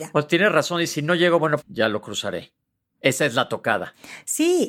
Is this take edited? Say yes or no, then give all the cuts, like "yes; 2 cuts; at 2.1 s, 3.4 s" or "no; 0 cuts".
yes; 1 cut; at 1.6 s